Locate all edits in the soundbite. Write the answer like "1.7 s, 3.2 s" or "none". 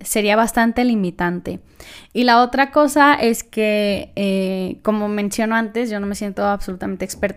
none